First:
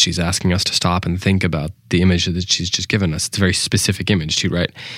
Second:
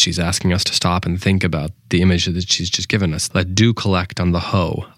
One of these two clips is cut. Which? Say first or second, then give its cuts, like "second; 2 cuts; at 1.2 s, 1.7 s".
second; 1 cut; at 3.3 s